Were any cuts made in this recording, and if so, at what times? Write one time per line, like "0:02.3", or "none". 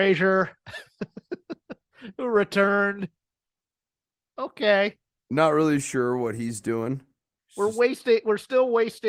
none